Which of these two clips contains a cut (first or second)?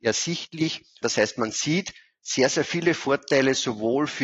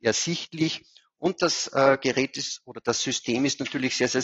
first